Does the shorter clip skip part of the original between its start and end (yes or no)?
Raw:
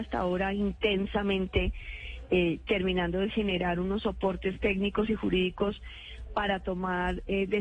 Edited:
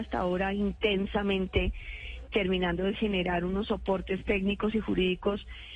yes